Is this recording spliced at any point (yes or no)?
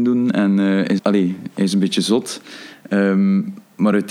yes